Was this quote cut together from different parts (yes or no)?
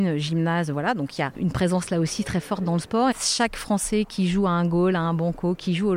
yes